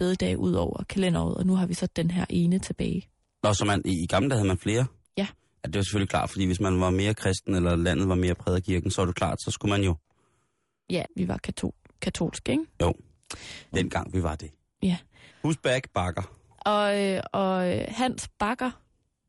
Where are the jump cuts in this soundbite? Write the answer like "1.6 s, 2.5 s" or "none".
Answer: 11.0 s, 13.7 s, 15.3 s